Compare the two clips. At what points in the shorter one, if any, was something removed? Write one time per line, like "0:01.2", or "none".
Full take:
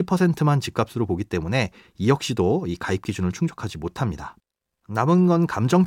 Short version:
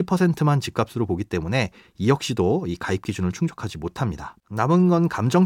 0:04.4